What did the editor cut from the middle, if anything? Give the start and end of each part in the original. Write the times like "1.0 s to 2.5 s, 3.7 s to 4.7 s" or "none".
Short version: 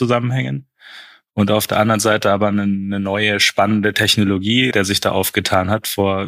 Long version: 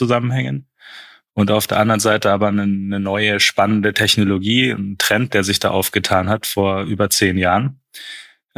4.7 s to 5.3 s